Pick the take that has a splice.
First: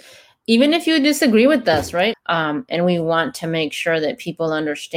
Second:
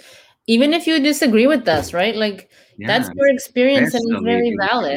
first; 1 cut; at 2.1 s

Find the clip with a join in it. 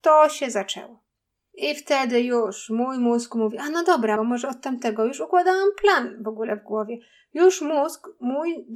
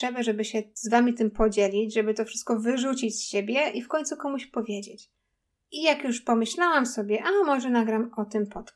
first; 1 cut; at 4.2 s

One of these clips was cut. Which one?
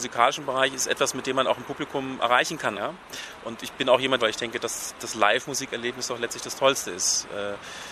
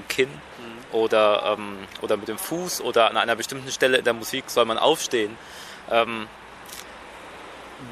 first; 2 cuts; at 2.7 s, 4.2 s

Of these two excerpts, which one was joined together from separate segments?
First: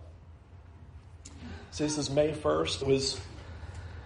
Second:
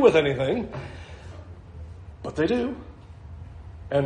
first; 1 cut; at 2.8 s

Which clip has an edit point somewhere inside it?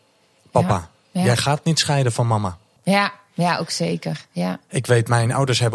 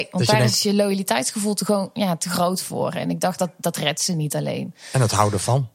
first; 1 cut; at 2.8 s

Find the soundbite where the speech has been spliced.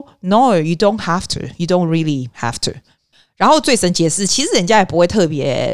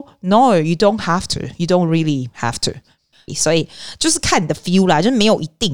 second; 1 cut; at 3.3 s

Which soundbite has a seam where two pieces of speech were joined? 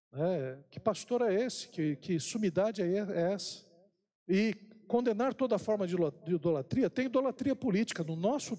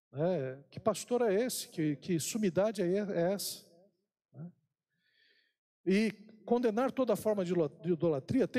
first; 1 cut; at 4.2 s

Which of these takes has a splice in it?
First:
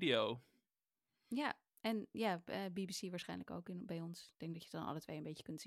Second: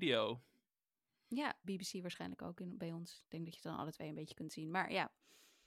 second; 1 cut; at 1.6 s

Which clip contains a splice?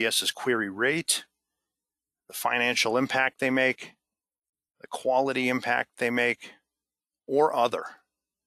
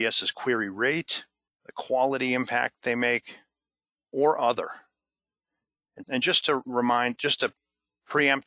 second; 2 cuts; at 1.5 s, 6.0 s

